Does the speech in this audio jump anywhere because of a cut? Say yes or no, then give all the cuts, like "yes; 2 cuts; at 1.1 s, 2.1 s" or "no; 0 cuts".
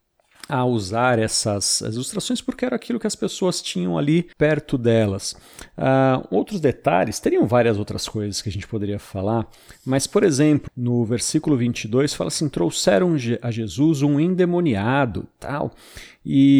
yes; 2 cuts; at 4.3 s, 10.7 s